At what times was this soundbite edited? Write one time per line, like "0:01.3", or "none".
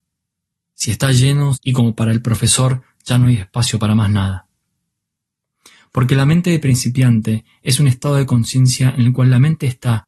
0:01.5